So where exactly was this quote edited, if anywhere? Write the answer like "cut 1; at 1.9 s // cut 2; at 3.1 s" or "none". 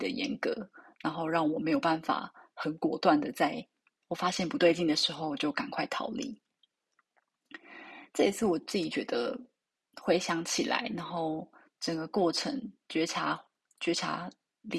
none